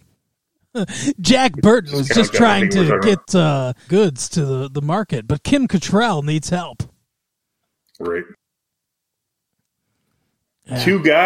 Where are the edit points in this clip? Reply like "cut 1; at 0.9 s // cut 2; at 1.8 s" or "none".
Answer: cut 1; at 3.9 s